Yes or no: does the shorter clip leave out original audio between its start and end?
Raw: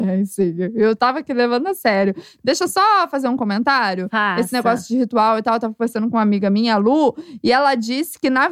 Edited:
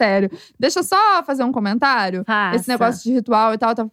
no